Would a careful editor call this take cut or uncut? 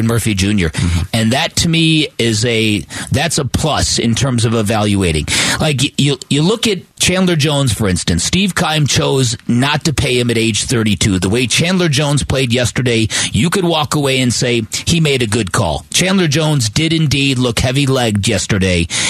uncut